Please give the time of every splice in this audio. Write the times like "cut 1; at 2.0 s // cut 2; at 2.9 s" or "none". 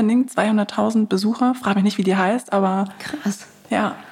none